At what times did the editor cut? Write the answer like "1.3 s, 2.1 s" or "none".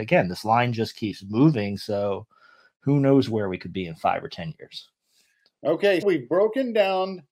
6.0 s